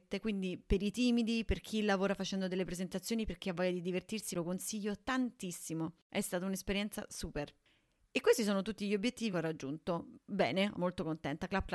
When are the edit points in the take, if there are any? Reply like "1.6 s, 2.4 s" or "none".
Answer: 9.3 s, 10.7 s